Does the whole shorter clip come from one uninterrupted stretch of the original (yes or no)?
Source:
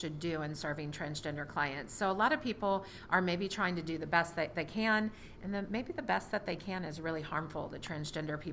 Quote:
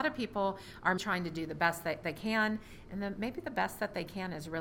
no